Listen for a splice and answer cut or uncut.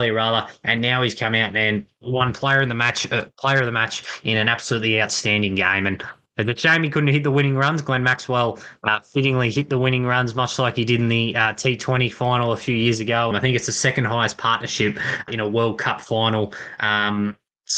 cut